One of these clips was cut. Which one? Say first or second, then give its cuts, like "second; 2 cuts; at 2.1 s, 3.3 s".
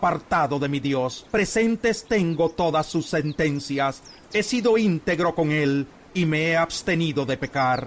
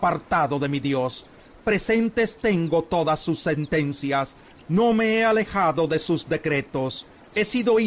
first; 2 cuts; at 1.3 s, 4.2 s